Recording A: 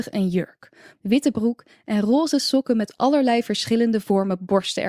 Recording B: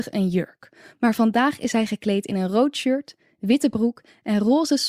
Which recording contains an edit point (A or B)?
A